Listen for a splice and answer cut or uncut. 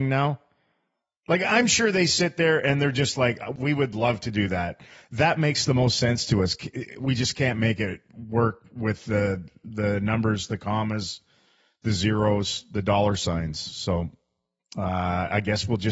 uncut